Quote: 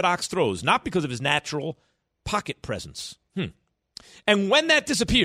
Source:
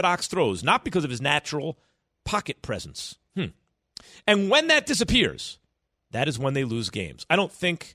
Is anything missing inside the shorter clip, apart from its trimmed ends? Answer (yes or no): no